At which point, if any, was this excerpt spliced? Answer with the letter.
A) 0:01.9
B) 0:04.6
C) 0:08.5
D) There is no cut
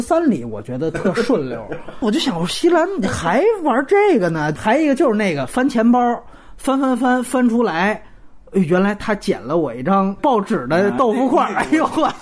D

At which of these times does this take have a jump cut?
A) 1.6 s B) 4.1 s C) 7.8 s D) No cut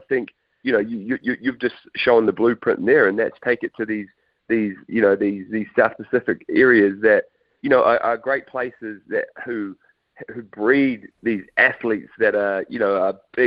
D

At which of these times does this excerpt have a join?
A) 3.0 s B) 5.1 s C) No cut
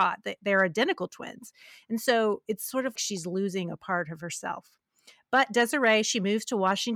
A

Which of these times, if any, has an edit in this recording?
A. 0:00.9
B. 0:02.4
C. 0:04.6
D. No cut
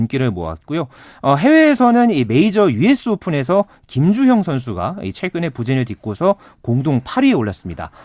D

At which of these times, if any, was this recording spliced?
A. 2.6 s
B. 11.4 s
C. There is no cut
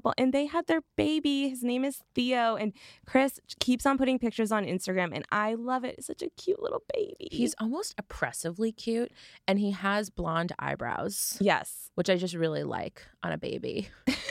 C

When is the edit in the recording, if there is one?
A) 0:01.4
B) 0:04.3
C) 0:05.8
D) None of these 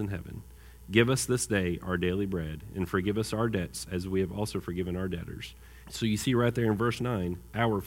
C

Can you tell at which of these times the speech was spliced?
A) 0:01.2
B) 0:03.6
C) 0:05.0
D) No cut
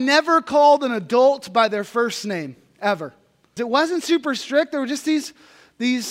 B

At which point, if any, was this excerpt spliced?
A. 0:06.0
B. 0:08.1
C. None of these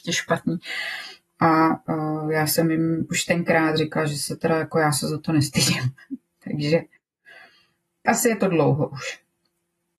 B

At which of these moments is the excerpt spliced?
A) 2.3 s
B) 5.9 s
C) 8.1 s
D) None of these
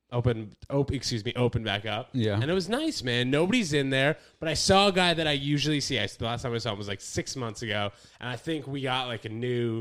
D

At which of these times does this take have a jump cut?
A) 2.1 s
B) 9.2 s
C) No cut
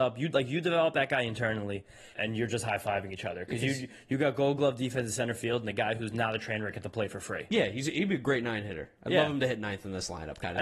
A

